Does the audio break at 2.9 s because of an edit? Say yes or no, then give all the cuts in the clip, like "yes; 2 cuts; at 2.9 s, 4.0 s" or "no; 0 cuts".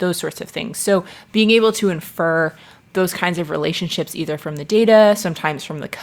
no; 0 cuts